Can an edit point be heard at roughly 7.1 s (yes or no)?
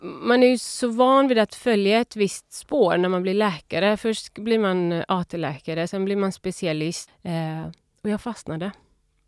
yes